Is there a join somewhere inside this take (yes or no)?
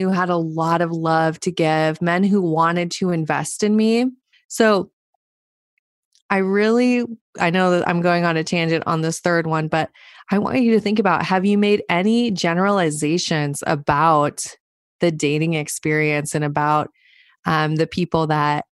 yes